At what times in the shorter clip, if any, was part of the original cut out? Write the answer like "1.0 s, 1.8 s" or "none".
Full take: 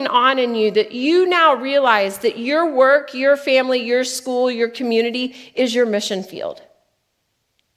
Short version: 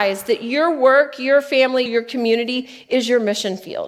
1.9 s

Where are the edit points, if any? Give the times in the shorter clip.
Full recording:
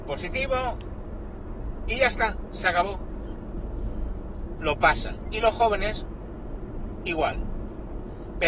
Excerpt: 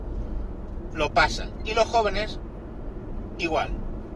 none

